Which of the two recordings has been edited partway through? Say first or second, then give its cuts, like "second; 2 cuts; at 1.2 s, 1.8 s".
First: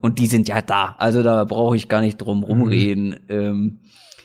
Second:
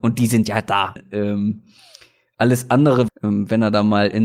second; 2 cuts; at 1.0 s, 3.1 s